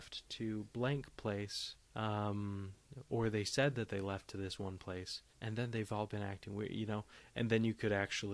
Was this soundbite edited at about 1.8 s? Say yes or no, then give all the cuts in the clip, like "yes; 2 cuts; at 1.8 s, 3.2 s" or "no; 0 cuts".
yes; 2 cuts; at 1.8 s, 5.3 s